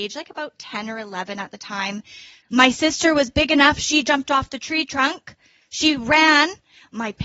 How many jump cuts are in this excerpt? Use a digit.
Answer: 1